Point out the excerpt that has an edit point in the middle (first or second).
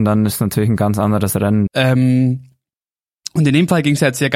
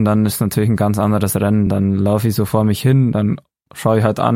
first